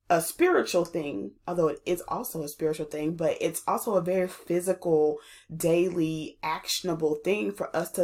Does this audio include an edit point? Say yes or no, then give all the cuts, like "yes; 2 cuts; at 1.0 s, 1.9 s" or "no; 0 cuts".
no; 0 cuts